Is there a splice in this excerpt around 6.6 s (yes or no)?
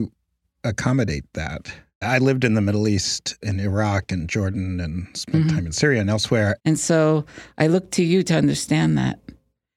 yes